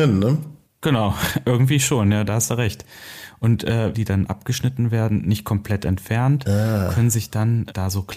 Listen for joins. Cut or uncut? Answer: cut